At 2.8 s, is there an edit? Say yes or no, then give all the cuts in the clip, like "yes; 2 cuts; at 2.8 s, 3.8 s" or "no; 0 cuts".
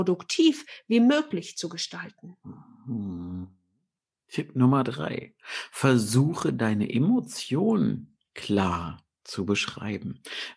no; 0 cuts